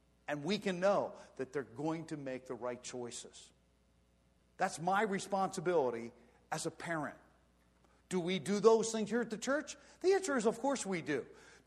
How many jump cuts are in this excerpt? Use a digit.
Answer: 1